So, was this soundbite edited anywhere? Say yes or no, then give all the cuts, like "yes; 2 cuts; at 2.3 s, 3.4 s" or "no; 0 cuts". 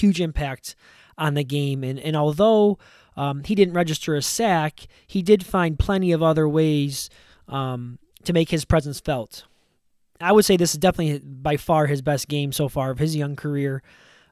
no; 0 cuts